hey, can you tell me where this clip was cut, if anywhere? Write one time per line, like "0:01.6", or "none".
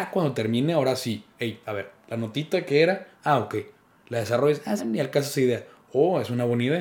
0:04.8